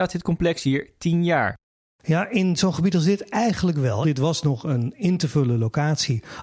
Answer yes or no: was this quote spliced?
yes